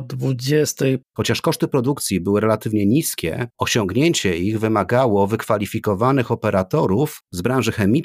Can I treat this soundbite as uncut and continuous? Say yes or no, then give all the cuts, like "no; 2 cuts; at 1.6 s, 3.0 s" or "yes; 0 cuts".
no; 1 cut; at 1.0 s